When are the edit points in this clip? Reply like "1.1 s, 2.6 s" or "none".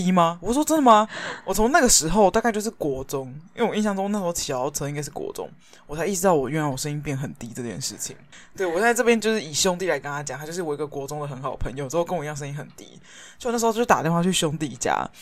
1.4 s, 8.3 s